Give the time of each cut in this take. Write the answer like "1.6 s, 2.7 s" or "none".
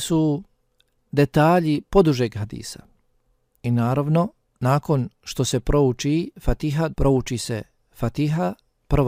3.5 s, 6.9 s